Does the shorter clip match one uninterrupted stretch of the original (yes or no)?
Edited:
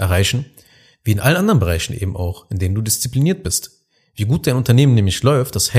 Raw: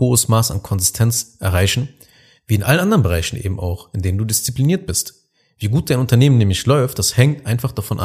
yes